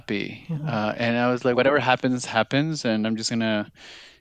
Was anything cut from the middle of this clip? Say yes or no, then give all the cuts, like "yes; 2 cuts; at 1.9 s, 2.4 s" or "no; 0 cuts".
no; 0 cuts